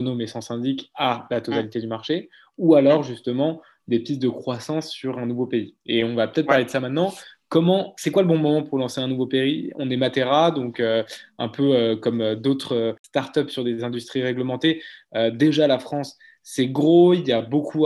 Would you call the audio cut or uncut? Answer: uncut